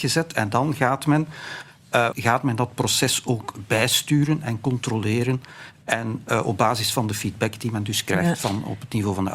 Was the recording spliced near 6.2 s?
no; 1 cut; at 2.1 s

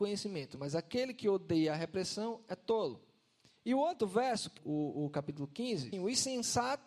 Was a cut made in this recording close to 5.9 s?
yes; 2 cuts; at 4.6 s, 5.9 s

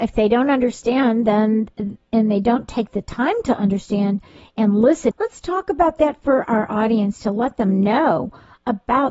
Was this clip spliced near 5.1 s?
yes; 1 cut; at 5.1 s

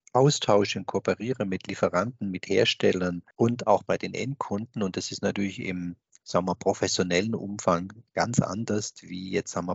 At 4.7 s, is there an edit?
no; 1 cut; at 3.3 s

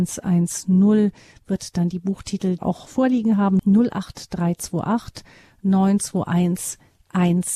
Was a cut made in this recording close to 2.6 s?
yes; 1 cut; at 2.6 s

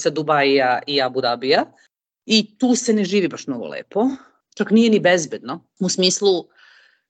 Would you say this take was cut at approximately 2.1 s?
no; 0 cuts

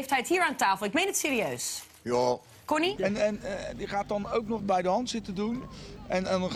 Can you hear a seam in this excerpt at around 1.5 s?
no; 2 cuts; at 3.0 s, 4.6 s

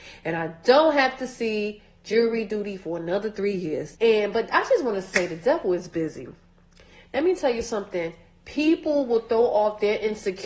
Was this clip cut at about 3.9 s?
yes; 1 cut; at 3.9 s

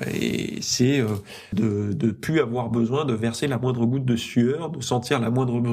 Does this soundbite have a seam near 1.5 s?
yes; 1 cut; at 1.5 s

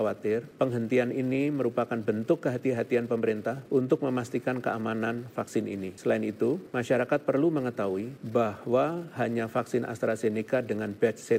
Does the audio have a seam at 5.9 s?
no; 0 cuts

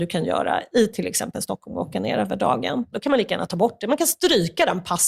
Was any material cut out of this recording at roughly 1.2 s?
no; 1 cut; at 2.9 s

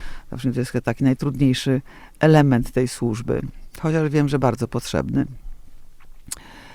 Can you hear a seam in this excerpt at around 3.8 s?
no; 0 cuts

